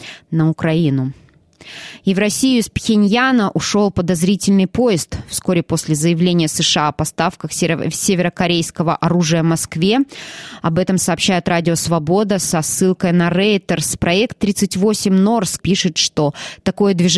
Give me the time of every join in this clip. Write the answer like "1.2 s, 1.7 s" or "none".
15.6 s